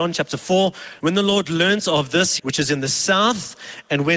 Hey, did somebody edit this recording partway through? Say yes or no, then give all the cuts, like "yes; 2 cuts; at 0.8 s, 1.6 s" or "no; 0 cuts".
yes; 2 cuts; at 1.0 s, 2.4 s